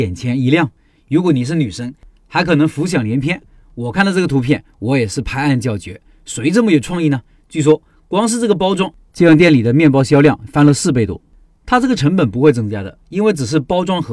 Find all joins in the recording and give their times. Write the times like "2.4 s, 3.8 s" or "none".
none